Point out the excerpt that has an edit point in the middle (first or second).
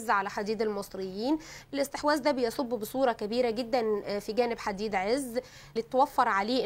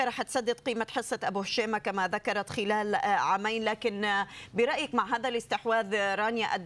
first